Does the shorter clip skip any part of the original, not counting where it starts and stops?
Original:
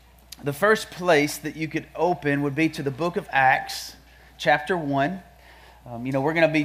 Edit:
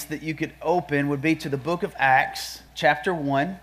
yes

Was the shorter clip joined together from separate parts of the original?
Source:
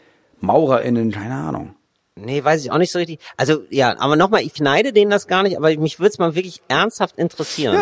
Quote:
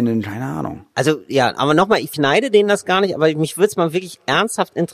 yes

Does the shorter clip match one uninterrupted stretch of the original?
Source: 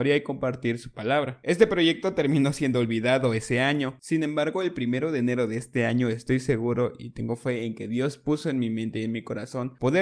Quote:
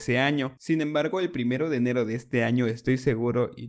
yes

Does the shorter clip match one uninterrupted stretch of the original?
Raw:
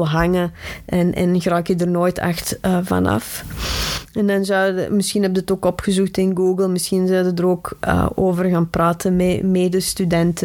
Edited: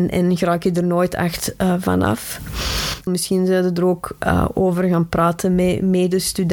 no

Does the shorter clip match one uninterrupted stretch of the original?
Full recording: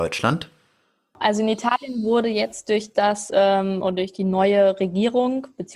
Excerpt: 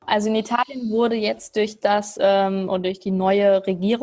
yes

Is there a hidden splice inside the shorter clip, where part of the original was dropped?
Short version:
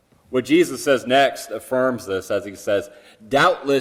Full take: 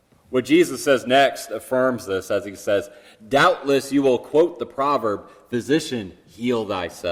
no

